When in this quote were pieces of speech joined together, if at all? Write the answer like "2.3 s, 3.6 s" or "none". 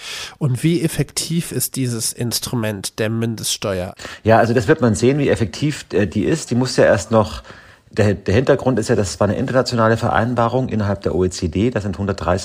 none